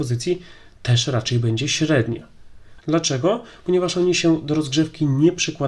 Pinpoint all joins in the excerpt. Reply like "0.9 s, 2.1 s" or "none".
2.8 s